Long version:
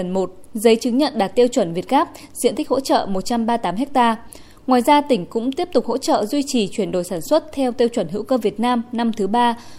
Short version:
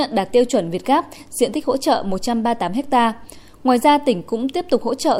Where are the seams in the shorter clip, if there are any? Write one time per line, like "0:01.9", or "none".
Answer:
none